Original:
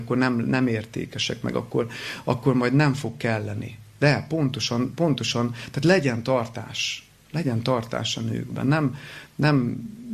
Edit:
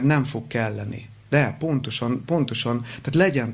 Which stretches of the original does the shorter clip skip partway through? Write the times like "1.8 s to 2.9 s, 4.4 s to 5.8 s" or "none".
none